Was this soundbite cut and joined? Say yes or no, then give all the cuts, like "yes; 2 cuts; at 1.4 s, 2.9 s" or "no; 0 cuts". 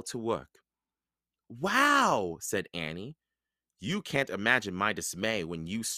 no; 0 cuts